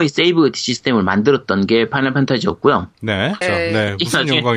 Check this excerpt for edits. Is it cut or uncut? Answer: cut